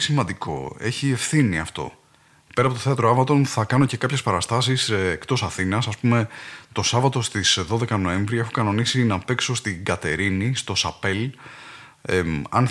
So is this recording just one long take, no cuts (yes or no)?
yes